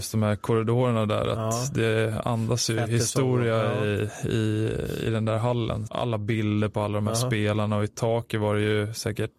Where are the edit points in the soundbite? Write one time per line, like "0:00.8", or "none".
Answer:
0:05.9